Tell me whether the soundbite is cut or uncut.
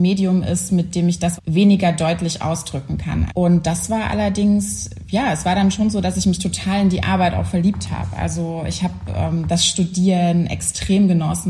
cut